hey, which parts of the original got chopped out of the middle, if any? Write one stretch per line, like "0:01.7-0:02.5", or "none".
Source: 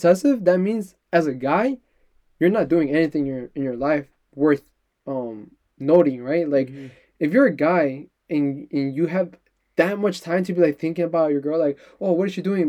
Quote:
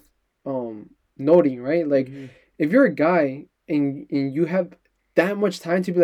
none